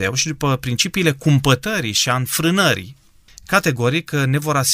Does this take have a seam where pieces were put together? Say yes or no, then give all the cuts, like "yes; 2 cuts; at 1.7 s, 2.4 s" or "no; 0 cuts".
no; 0 cuts